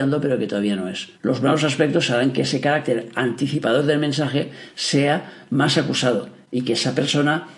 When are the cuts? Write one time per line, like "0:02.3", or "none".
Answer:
0:01.1